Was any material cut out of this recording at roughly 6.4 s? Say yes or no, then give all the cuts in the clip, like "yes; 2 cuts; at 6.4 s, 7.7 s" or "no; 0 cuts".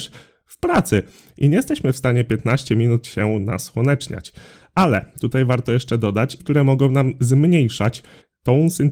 yes; 1 cut; at 6.4 s